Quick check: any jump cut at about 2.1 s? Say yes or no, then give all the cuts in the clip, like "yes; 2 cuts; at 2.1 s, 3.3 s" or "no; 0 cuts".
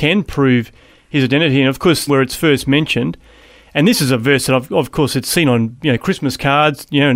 yes; 1 cut; at 2.1 s